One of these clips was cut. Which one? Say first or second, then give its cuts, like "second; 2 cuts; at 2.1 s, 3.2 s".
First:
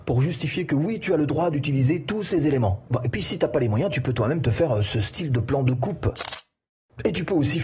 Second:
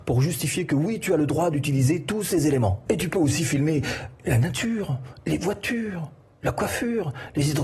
second; 1 cut; at 2.9 s